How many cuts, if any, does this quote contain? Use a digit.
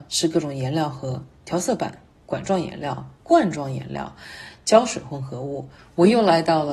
1